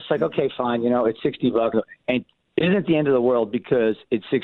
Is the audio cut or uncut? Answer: cut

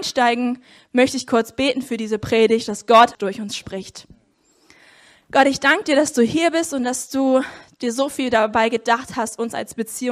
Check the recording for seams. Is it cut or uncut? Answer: cut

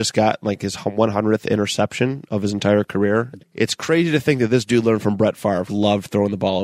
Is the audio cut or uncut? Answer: cut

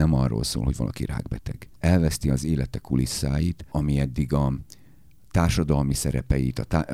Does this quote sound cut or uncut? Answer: cut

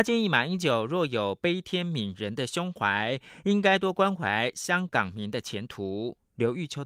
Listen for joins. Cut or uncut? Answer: cut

